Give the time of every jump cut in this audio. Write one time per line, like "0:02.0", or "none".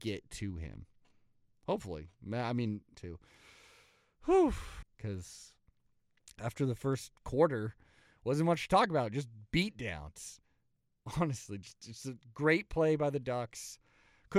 0:02.9
0:04.8